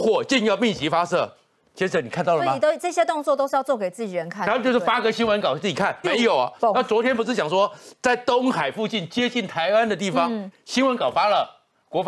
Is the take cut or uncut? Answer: cut